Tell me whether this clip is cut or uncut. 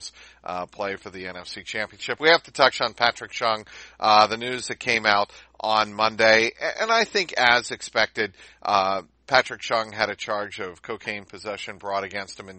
uncut